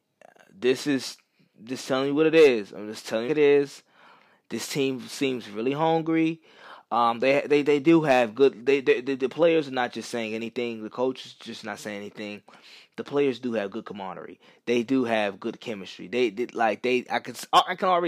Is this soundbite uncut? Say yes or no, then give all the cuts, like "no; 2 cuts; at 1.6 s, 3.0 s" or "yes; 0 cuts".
no; 1 cut; at 3.3 s